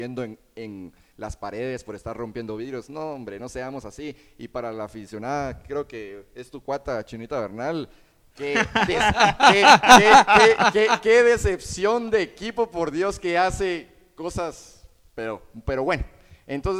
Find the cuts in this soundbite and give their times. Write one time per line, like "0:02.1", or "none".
none